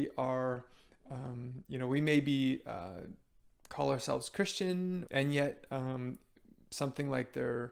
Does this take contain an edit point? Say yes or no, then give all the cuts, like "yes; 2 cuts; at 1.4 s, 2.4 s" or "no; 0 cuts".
yes; 1 cut; at 5.1 s